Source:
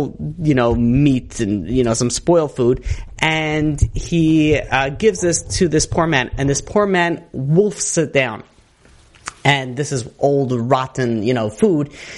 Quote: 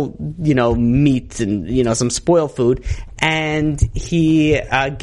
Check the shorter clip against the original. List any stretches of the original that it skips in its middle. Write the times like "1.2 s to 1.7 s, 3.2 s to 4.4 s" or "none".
none